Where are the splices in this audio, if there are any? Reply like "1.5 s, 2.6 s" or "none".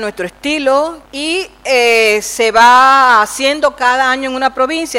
1.0 s